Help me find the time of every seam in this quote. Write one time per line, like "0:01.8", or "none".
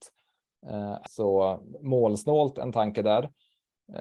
0:01.1